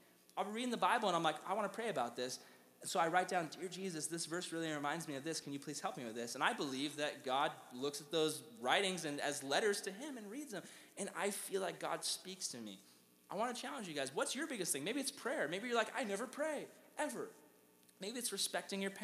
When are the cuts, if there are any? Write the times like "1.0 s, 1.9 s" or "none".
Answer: none